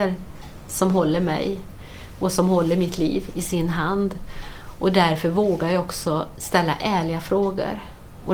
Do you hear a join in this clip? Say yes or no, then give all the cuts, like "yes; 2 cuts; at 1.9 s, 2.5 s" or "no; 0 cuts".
no; 0 cuts